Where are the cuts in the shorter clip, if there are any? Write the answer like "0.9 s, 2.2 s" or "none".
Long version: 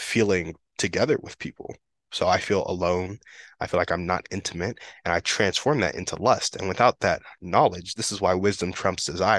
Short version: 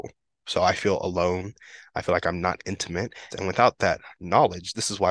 3.3 s